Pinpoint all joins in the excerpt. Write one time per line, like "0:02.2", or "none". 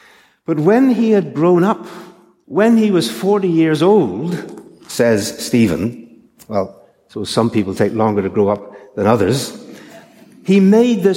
0:02.4